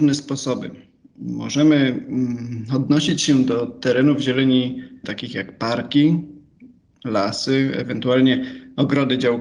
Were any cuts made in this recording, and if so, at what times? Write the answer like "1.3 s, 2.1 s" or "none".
5.0 s